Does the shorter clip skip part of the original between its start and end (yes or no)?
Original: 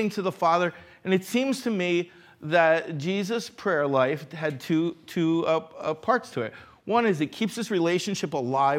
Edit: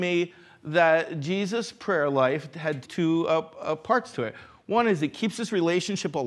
yes